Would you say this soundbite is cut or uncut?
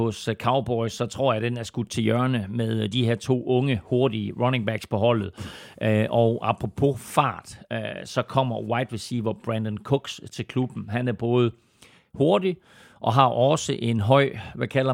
uncut